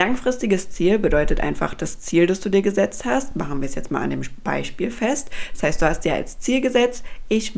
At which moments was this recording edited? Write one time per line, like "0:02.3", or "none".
none